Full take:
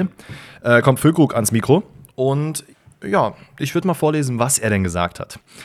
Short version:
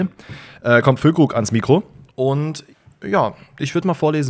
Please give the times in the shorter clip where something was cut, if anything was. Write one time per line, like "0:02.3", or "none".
none